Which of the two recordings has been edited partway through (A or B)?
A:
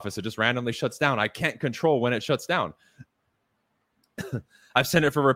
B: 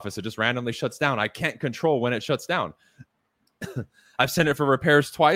B